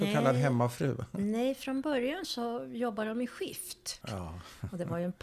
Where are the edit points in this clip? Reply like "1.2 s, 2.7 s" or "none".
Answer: 4.0 s